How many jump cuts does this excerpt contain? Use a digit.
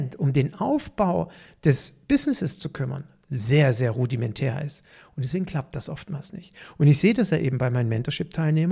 0